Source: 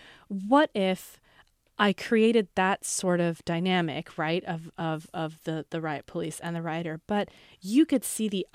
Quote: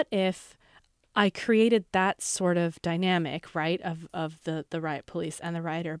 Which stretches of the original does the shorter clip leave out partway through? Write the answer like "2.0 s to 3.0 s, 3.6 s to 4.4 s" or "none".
4.7 s to 5.1 s